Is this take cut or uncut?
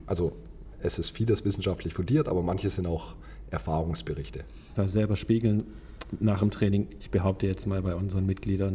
cut